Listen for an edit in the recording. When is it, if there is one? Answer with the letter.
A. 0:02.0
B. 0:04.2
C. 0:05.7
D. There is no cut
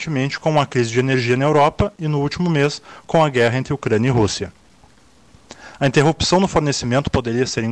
C